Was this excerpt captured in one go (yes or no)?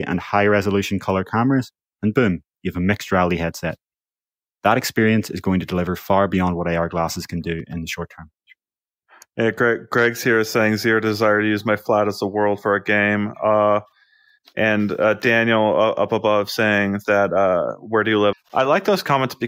no